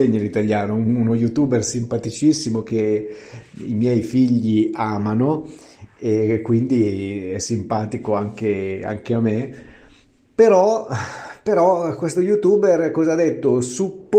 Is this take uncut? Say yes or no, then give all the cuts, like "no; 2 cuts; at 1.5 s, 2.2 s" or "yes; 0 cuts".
yes; 0 cuts